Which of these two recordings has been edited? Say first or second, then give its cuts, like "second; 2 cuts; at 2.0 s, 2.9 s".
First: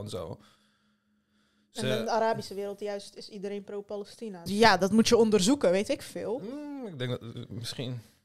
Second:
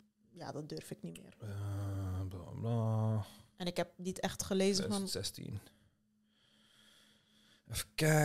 first; 1 cut; at 4.5 s